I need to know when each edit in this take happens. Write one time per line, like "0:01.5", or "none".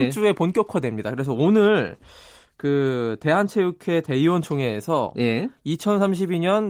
none